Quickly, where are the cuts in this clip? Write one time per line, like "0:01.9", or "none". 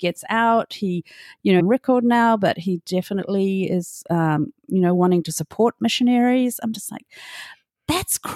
0:01.6